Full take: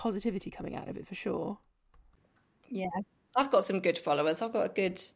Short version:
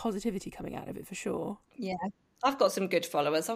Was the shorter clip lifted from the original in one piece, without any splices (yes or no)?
no